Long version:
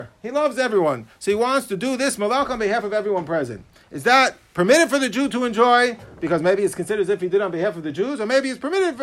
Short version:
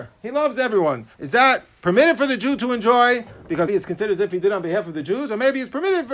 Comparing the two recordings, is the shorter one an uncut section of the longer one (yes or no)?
no